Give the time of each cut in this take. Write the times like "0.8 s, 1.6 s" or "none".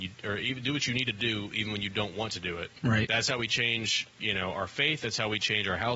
2.8 s, 4.1 s